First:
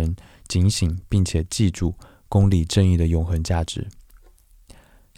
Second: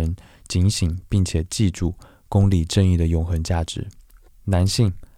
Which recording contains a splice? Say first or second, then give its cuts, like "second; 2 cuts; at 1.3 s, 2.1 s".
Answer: second; 1 cut; at 4.3 s